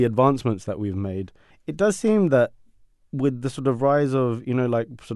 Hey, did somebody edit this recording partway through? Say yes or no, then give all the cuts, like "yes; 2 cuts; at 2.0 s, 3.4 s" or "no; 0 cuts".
yes; 1 cut; at 1.5 s